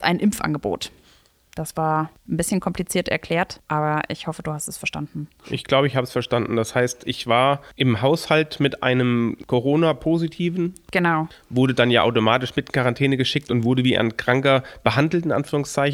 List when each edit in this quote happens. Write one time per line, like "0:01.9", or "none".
none